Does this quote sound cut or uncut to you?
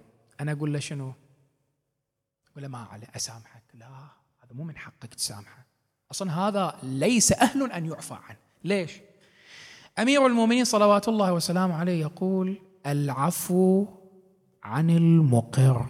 uncut